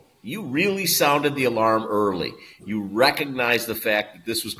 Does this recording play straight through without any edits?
yes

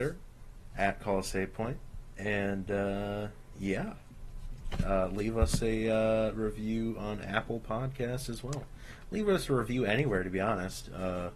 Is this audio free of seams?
yes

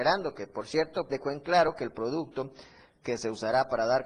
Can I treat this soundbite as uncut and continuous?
no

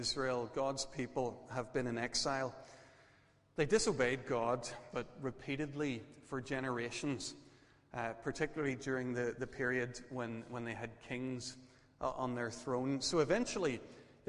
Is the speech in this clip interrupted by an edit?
yes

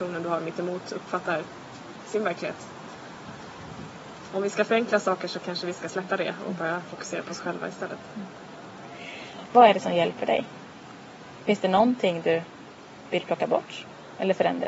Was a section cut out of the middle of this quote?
yes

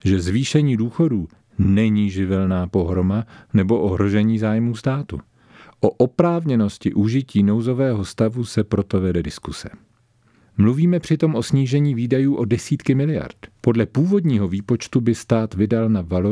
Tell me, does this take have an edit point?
yes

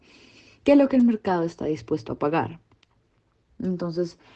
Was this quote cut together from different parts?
yes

